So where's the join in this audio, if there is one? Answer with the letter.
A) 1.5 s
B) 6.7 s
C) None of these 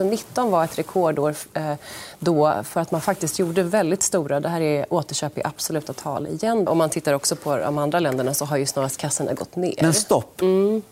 B